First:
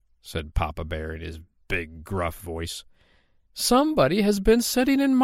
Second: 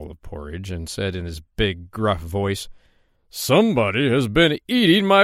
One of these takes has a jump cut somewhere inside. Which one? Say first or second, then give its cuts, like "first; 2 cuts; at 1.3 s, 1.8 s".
first; 1 cut; at 3.5 s